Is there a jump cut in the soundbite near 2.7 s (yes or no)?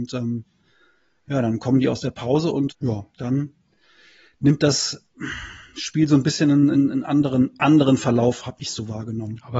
yes